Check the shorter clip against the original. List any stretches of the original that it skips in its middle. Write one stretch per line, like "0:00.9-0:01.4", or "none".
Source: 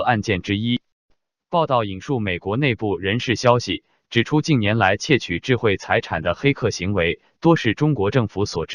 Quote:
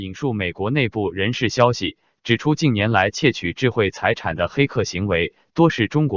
none